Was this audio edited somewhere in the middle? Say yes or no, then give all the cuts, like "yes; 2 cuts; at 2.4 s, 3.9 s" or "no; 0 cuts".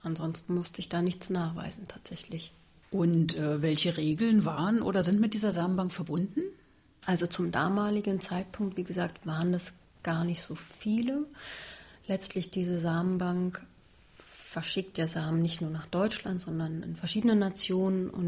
no; 0 cuts